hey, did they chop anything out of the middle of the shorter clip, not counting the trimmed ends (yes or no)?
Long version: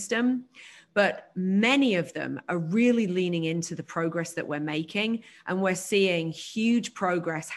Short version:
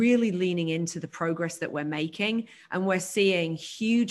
no